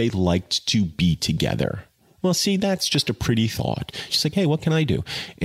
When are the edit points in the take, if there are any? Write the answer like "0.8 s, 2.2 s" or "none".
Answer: 4.1 s